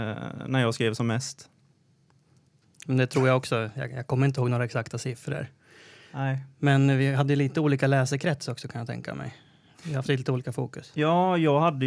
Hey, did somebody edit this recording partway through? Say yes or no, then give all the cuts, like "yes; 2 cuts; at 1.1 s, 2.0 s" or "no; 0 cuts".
no; 0 cuts